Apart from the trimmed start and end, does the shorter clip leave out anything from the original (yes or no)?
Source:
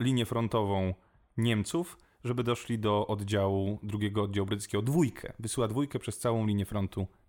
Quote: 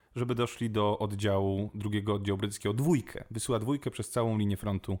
no